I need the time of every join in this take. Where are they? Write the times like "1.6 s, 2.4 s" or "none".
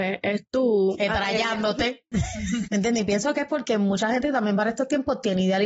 2.6 s

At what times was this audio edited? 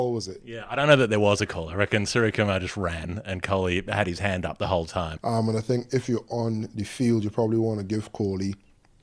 5.2 s

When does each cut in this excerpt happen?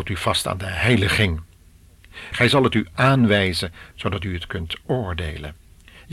2.3 s, 3.9 s

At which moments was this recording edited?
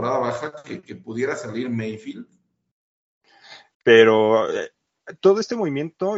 3.7 s

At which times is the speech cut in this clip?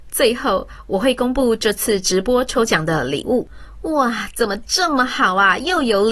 none

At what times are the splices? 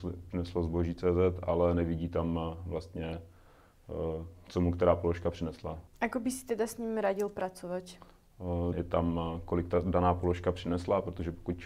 5.9 s, 8.7 s

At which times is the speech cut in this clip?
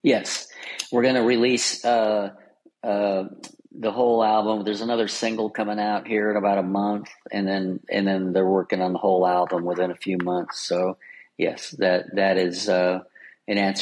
none

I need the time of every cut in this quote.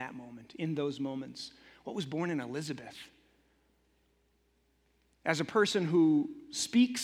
none

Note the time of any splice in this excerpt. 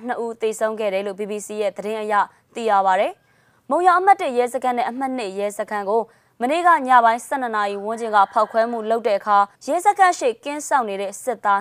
9.5 s

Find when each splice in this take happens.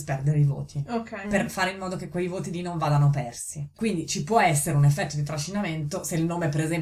1.2 s, 3.7 s

